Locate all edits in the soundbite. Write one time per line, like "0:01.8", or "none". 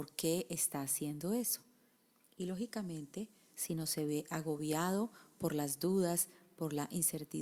0:03.5